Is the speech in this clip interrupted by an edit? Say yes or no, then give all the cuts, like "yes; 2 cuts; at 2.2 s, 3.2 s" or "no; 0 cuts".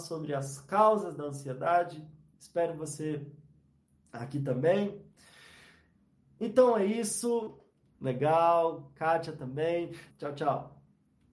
yes; 2 cuts; at 7.9 s, 10.1 s